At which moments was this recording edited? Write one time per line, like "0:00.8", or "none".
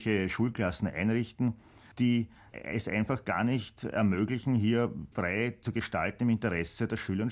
0:01.9
0:05.1